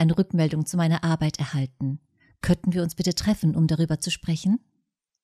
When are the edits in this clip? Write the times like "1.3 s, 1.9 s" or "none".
none